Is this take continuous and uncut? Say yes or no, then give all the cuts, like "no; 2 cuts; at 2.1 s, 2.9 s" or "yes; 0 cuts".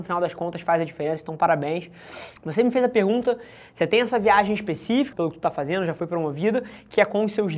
no; 2 cuts; at 2.4 s, 5.1 s